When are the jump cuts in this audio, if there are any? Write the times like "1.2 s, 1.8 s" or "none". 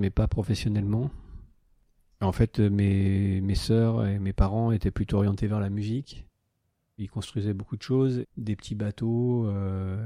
7.0 s, 8.2 s